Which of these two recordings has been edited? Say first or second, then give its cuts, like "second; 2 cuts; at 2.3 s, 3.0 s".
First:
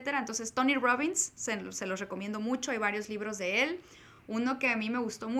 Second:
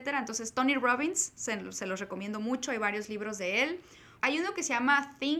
second; 1 cut; at 4.2 s